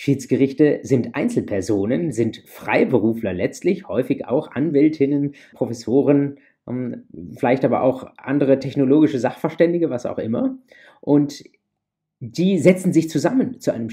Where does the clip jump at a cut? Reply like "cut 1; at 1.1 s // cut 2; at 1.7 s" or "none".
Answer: cut 1; at 5.5 s

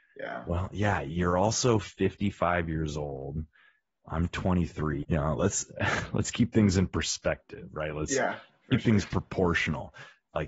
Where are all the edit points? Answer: cut 1; at 5.0 s

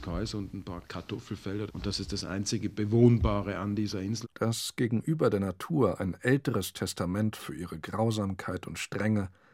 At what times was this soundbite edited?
cut 1; at 1.7 s // cut 2; at 4.2 s

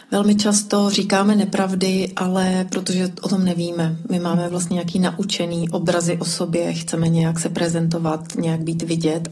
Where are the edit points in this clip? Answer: none

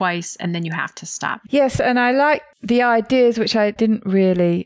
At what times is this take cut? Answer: cut 1; at 1.4 s

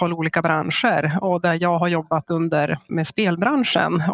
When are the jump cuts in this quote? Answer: cut 1; at 2.9 s

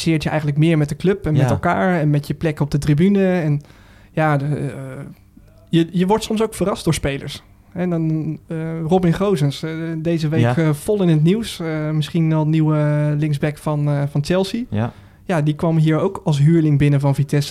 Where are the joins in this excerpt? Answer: none

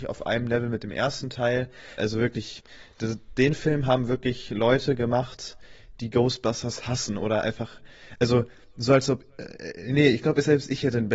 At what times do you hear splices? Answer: cut 1; at 2.0 s

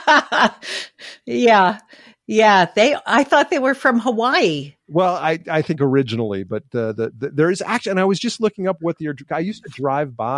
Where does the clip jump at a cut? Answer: none

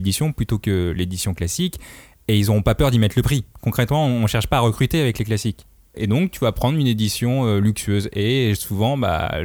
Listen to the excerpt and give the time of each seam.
cut 1; at 5.9 s

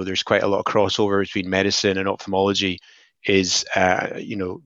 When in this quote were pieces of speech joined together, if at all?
none

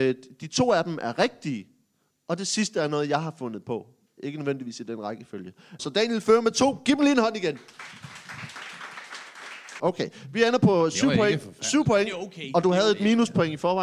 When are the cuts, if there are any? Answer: cut 1; at 5.8 s // cut 2; at 9.8 s

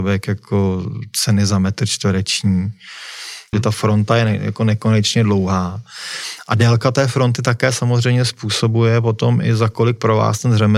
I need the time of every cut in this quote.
cut 1; at 3.5 s

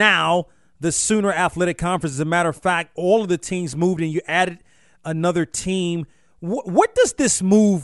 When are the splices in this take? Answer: none

